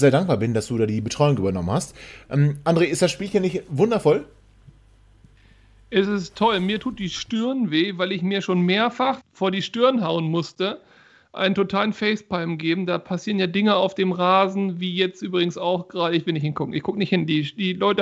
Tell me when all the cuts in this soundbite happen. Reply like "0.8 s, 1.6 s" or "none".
9.2 s